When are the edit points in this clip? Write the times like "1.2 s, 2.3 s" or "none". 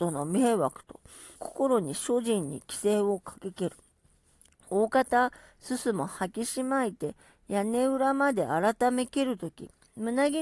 1.4 s

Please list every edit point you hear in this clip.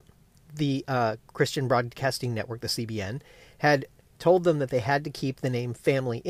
none

